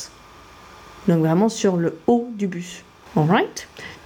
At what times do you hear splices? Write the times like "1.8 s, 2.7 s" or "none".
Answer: 3.1 s